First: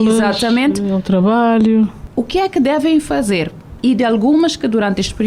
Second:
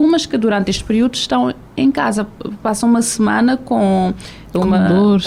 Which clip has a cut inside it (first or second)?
first